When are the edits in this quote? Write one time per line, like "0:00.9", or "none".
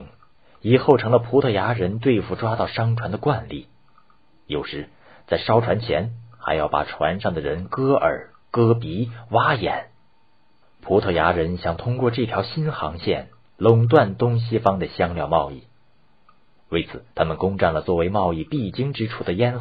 0:10.6
0:17.1